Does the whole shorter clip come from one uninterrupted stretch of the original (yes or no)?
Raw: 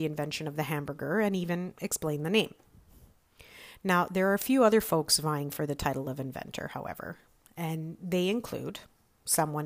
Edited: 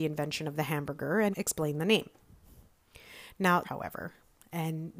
no